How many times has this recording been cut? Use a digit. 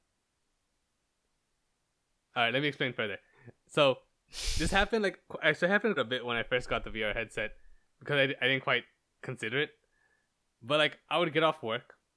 1